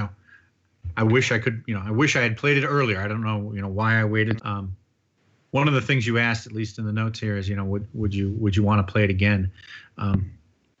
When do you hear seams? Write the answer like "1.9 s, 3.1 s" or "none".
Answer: 4.4 s